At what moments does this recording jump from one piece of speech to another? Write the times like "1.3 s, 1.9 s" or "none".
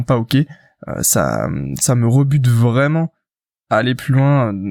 none